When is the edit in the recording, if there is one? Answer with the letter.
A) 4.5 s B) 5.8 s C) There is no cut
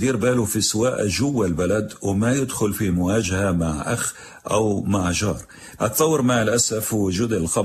B